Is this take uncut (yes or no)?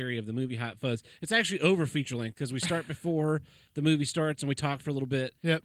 yes